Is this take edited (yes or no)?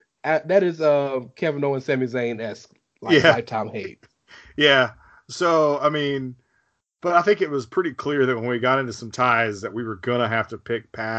no